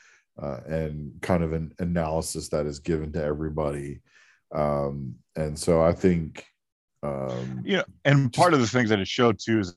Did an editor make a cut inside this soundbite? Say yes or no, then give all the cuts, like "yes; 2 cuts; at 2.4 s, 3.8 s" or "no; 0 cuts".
no; 0 cuts